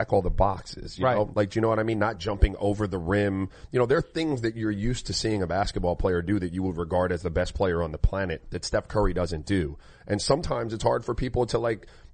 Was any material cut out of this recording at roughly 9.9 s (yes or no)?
no